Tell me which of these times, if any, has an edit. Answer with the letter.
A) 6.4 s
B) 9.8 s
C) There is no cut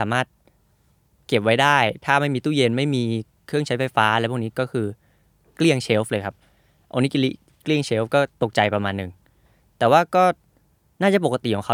C